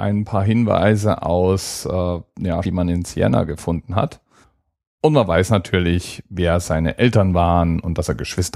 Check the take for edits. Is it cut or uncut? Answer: cut